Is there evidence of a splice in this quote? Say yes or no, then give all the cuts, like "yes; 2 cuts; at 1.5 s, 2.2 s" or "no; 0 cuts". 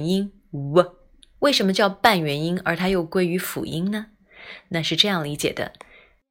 no; 0 cuts